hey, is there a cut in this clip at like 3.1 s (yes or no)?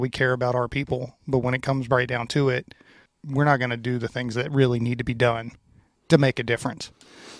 yes